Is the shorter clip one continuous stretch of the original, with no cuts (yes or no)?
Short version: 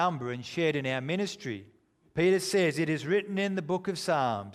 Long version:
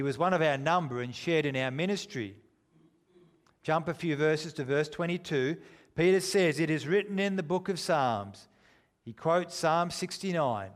no